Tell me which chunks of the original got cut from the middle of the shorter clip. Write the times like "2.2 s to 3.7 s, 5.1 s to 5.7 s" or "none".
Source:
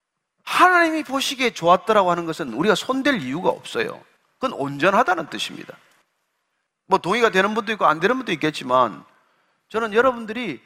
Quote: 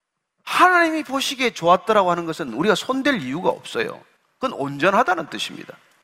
none